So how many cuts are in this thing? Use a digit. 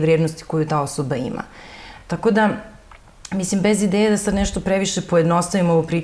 0